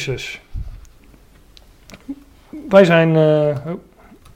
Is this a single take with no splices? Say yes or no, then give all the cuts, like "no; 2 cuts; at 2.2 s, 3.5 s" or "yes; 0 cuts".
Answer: yes; 0 cuts